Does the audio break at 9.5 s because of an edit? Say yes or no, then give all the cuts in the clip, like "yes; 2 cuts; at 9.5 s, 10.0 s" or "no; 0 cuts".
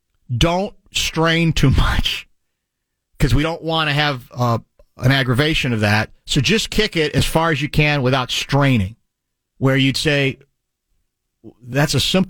yes; 1 cut; at 9.5 s